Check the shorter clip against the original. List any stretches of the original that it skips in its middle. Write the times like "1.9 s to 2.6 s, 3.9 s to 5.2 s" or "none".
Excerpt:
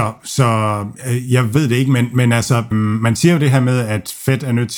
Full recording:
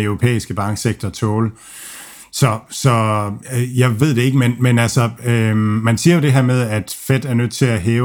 5.2 s to 5.5 s